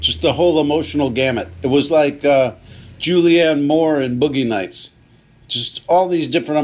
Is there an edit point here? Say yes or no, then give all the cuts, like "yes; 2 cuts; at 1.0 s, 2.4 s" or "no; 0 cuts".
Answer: no; 0 cuts